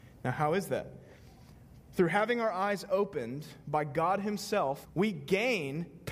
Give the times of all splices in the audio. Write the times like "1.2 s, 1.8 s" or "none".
1.8 s, 4.8 s